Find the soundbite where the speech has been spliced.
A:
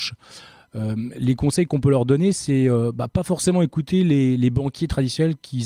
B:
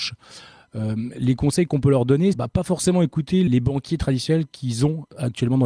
B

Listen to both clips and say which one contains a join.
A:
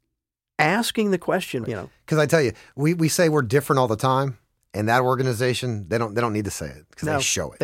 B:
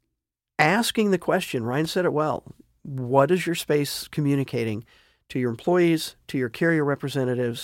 A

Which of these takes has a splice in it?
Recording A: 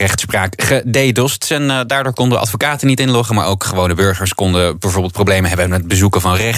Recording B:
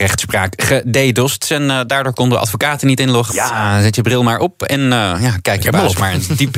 B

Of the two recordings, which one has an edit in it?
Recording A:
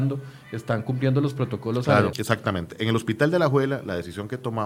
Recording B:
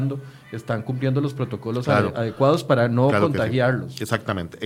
A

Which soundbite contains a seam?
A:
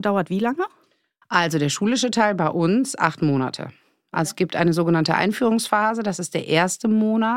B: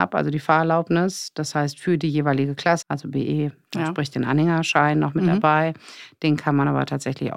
B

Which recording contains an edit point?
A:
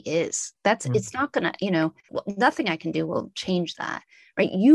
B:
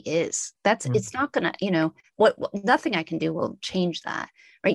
A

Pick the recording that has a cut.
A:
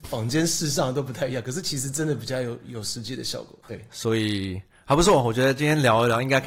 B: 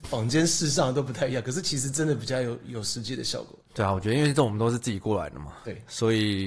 A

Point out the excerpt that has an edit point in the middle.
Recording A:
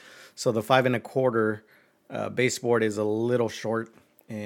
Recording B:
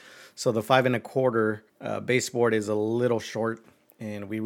B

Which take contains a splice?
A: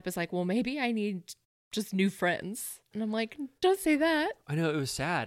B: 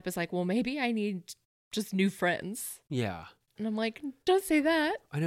A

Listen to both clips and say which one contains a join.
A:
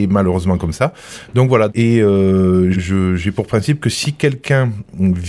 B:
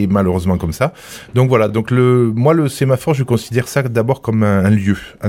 A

